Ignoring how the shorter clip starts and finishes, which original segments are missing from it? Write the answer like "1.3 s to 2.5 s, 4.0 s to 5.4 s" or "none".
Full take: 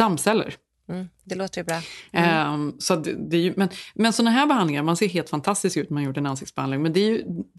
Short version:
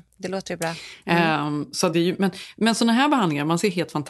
3.0 s to 3.3 s